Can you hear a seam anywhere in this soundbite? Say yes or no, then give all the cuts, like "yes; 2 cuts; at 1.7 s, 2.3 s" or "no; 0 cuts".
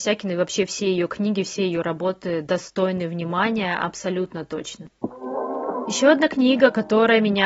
no; 0 cuts